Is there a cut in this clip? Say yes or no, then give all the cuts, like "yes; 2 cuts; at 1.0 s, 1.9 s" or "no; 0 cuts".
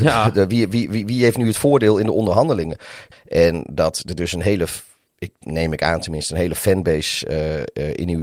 yes; 1 cut; at 3.1 s